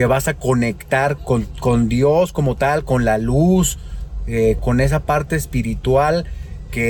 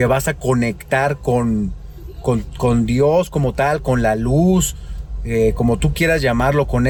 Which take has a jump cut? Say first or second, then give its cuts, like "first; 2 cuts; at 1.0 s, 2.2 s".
first; 2 cuts; at 1.2 s, 4.6 s